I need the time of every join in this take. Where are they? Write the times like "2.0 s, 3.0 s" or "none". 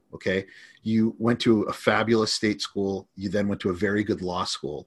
none